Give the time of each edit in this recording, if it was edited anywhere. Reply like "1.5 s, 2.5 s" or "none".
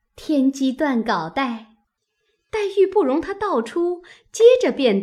2.0 s